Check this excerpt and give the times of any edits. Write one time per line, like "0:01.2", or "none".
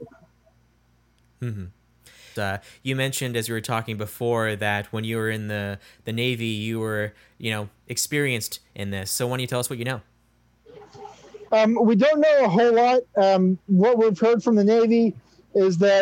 0:02.4
0:11.5